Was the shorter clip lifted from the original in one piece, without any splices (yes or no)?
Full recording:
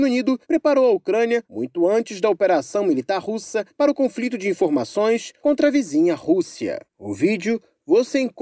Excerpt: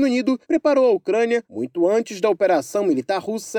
yes